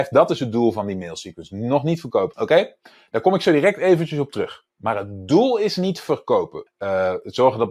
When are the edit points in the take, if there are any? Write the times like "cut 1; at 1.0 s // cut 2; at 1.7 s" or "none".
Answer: cut 1; at 2.3 s // cut 2; at 6.7 s

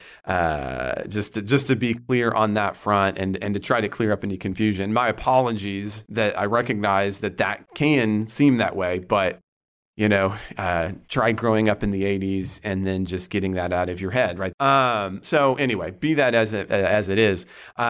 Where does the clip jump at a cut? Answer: cut 1; at 14.5 s // cut 2; at 16.7 s

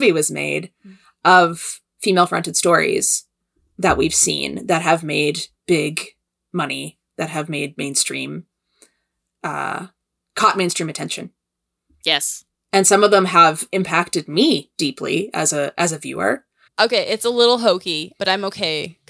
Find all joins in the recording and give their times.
cut 1; at 16.7 s // cut 2; at 18.2 s

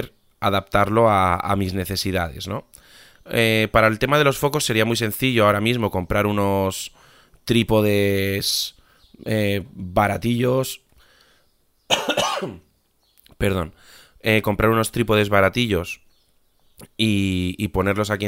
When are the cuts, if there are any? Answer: none

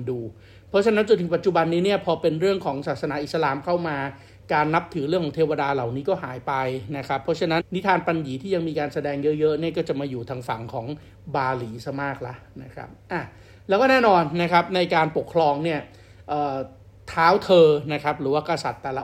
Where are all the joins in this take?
cut 1; at 7.6 s

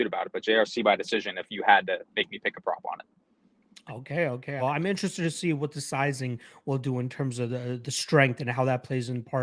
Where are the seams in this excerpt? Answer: cut 1; at 4.6 s

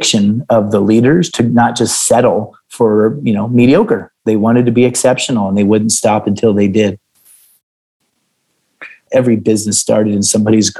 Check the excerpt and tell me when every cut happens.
cut 1; at 9.1 s

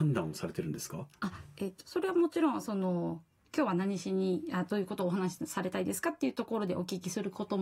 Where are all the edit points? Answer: none

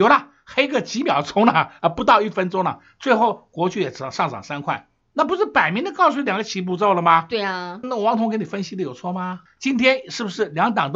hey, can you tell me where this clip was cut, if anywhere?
cut 1; at 7.8 s // cut 2; at 9.5 s

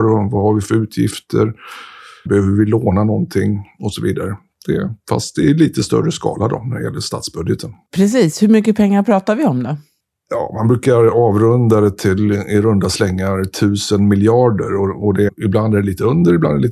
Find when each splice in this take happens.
cut 1; at 2.3 s // cut 2; at 15.3 s

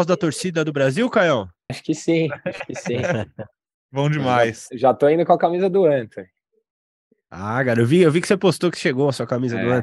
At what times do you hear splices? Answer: cut 1; at 1.7 s

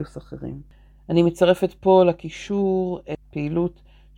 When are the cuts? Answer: none

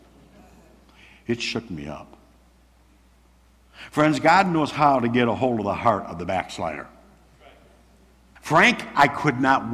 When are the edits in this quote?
cut 1; at 8.4 s

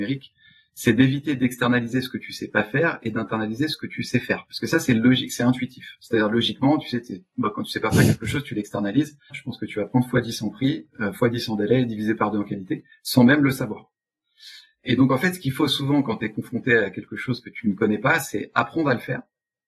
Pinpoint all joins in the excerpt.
cut 1; at 9.3 s

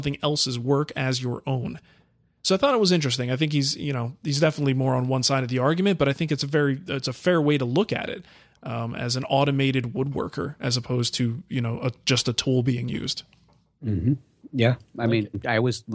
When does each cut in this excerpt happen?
none

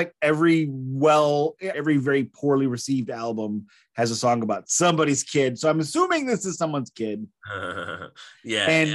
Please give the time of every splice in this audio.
cut 1; at 1.7 s

